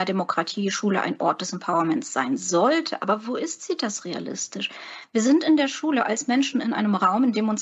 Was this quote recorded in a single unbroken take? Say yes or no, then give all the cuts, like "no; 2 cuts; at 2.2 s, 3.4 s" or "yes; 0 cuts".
yes; 0 cuts